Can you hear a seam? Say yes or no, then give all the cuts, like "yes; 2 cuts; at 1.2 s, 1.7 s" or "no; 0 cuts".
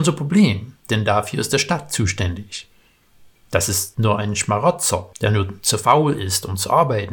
no; 0 cuts